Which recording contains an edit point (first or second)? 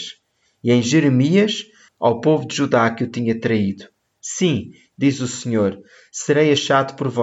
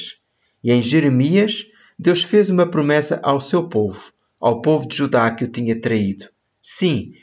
first